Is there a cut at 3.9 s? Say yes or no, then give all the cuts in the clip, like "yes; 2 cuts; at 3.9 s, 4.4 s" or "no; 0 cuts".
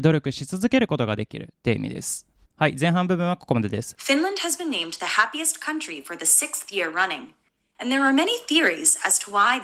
yes; 1 cut; at 3.9 s